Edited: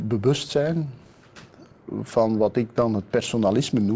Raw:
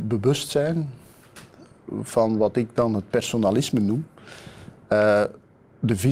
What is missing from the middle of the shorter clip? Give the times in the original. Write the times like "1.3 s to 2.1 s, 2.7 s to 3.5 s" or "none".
none

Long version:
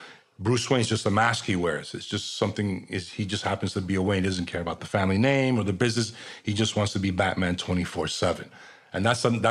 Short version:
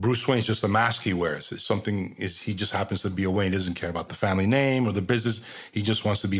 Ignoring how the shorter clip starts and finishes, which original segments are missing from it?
2.1 s to 2.4 s

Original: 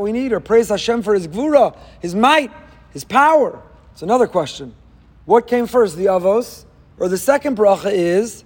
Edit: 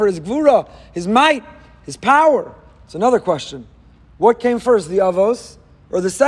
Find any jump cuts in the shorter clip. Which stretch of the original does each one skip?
none

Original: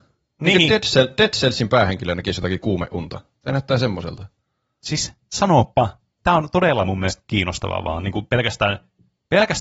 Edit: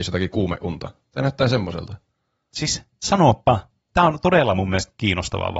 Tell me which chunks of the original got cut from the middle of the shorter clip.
none

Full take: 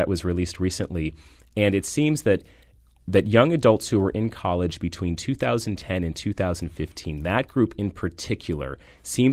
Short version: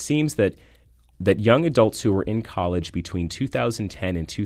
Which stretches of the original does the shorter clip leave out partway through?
none

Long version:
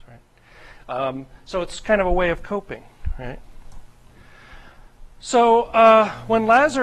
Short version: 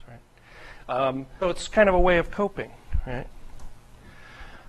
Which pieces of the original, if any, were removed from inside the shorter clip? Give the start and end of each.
1.4 s to 1.5 s

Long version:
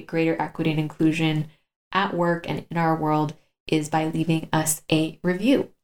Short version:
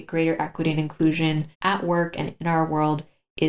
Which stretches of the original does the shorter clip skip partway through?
1.5 s to 1.8 s

